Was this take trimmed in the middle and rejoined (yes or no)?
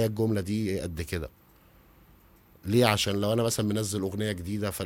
no